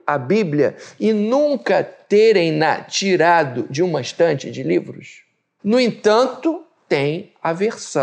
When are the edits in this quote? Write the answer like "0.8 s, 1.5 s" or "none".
5.6 s